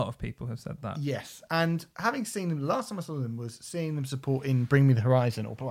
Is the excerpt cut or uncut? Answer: uncut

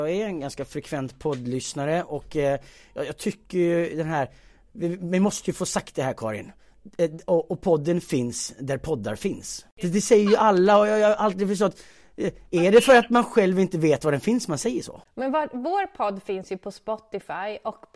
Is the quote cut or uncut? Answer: uncut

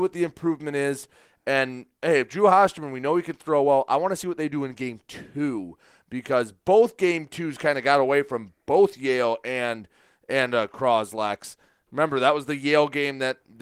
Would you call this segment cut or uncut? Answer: uncut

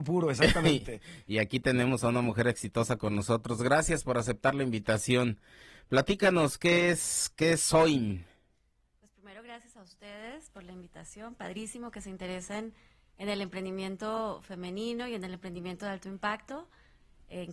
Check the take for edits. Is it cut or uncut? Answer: uncut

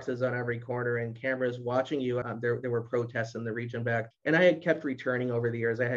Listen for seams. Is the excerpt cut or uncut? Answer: cut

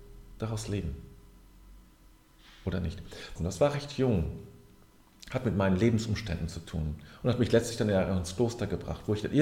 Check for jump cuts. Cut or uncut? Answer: cut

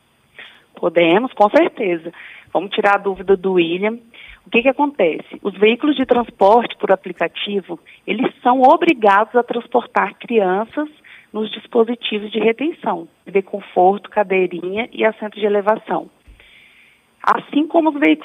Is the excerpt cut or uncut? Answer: cut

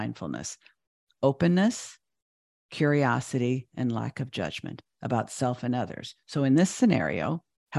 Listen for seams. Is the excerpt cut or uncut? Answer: uncut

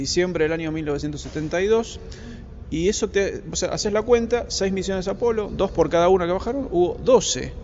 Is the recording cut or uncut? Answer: uncut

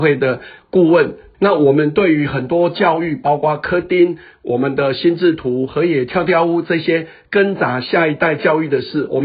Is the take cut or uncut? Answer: cut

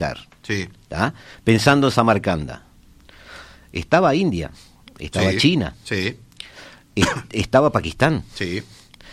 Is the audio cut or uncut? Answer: uncut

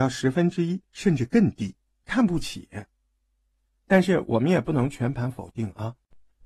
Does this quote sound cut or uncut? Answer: cut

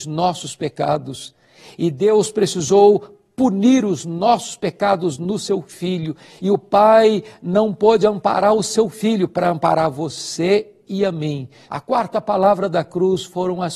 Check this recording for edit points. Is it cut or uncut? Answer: cut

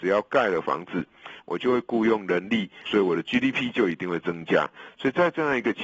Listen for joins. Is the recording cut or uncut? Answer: cut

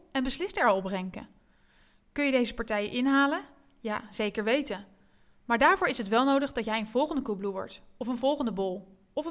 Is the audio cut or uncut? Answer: uncut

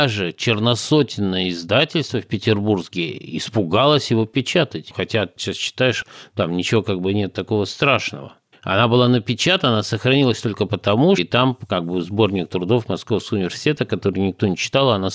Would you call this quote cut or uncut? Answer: cut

